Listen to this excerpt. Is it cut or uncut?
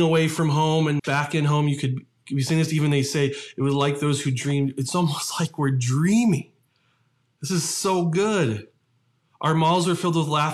cut